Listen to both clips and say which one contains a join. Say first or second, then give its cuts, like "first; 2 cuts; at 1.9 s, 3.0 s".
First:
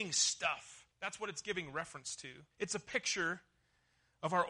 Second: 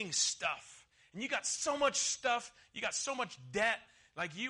first; 2 cuts; at 0.9 s, 2.5 s